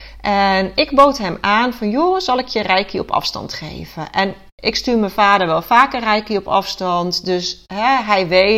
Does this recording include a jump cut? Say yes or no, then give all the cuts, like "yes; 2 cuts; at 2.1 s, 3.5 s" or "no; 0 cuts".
no; 0 cuts